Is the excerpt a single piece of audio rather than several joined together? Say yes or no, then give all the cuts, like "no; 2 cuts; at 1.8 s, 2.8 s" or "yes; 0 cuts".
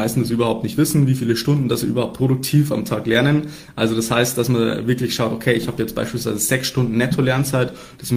yes; 0 cuts